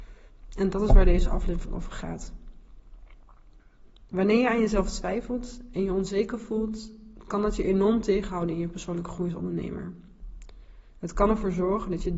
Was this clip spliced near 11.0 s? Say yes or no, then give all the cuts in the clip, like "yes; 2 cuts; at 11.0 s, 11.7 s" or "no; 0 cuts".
no; 1 cut; at 4.1 s